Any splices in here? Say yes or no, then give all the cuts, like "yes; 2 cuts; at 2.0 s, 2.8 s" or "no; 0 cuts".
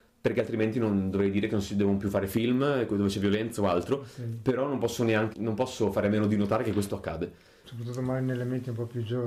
yes; 2 cuts; at 5.3 s, 7.6 s